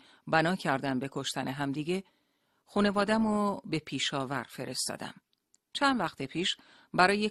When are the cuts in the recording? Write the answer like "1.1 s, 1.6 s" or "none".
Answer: none